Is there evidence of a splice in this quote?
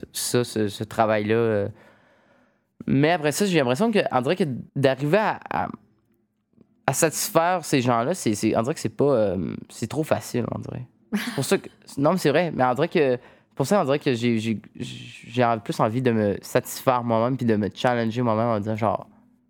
yes; 1 cut; at 4.7 s

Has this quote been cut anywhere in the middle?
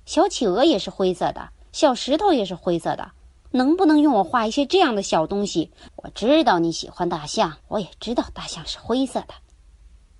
yes; 2 cuts; at 5.9 s, 7.6 s

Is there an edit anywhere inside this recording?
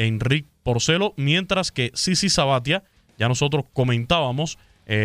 no; 0 cuts

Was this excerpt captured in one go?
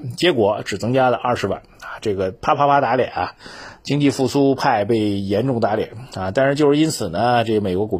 yes; 0 cuts

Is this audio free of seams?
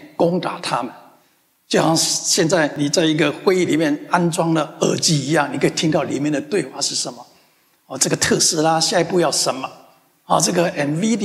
yes; 0 cuts

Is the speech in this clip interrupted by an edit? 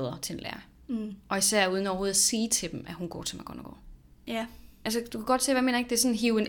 yes; 2 cuts; at 1.2 s, 4.1 s

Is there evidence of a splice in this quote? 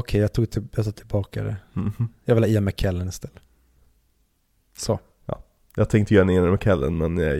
no; 0 cuts

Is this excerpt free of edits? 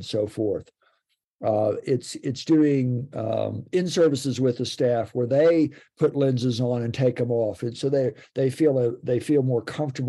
yes; 0 cuts

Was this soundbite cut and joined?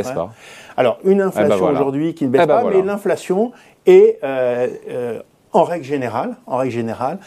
no; 0 cuts

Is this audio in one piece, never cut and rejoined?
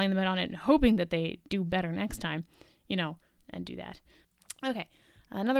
no; 1 cut; at 3.4 s

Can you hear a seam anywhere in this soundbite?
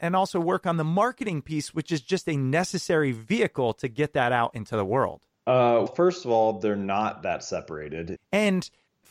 yes; 2 cuts; at 5.9 s, 8.2 s

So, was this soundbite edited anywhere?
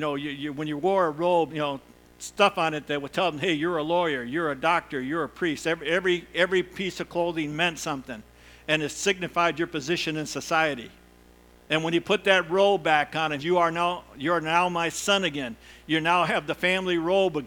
yes; 3 cuts; at 1.5 s, 11.7 s, 13.4 s

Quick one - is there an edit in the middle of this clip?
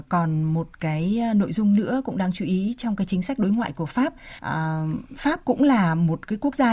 yes; 1 cut; at 4.4 s

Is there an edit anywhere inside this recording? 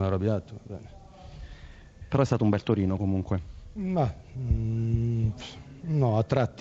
no; 0 cuts

